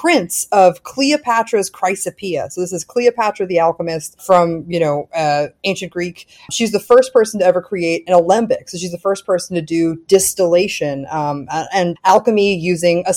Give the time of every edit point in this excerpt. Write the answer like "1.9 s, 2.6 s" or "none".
12.0 s

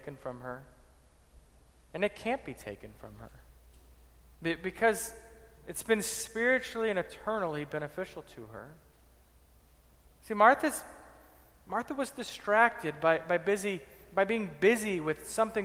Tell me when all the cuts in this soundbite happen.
none

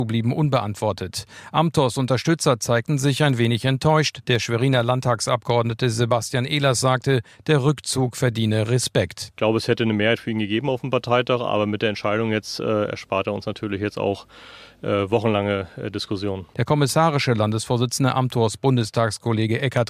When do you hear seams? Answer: none

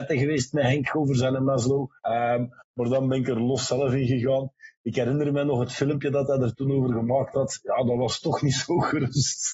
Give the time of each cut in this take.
2.0 s

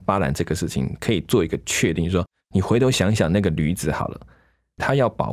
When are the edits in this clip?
none

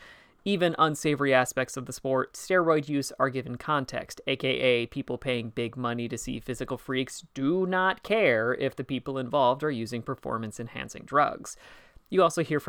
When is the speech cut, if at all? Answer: 2.3 s

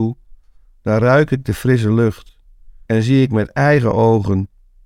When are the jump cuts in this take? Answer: 2.9 s

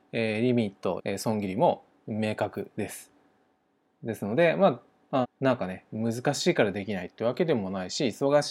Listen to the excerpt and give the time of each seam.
1.0 s, 5.2 s

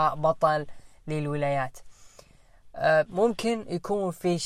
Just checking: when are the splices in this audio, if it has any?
3.1 s

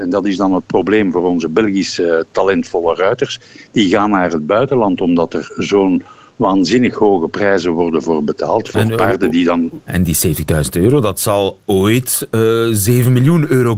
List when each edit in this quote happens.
9.9 s

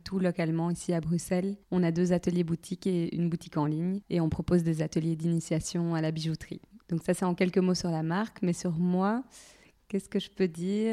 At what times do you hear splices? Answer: 1.6 s

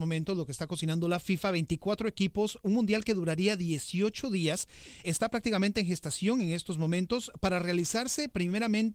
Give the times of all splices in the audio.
5.0 s

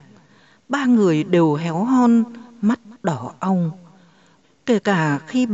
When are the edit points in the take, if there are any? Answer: 4.4 s

